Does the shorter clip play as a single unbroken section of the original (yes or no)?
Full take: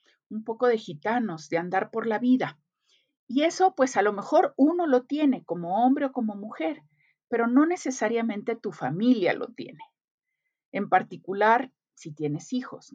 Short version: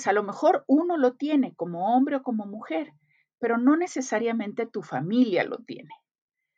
yes